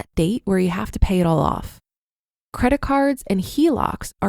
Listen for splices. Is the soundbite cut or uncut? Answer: uncut